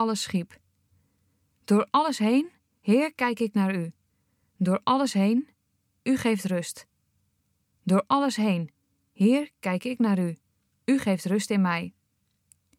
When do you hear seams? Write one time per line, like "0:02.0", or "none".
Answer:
none